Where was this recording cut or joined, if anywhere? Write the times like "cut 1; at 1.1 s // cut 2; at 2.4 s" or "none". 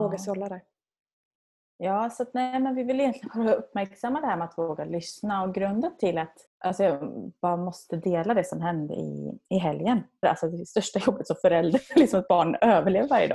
cut 1; at 6.5 s // cut 2; at 10.2 s